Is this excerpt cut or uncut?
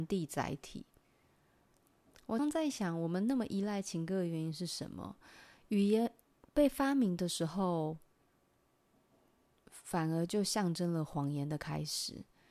cut